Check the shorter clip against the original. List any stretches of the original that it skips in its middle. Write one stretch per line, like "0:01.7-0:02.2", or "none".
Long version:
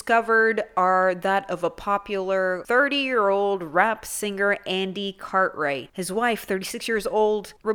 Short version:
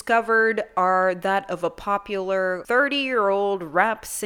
none